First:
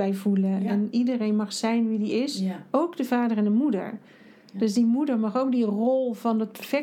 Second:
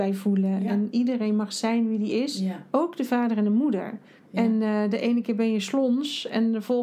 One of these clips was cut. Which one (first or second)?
second